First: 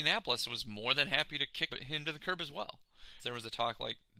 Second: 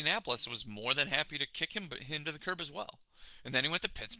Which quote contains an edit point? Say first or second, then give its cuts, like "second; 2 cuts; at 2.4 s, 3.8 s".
first; 2 cuts; at 1.7 s, 3.2 s